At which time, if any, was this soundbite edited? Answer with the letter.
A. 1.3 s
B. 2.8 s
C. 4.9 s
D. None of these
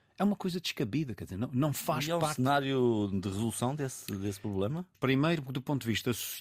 C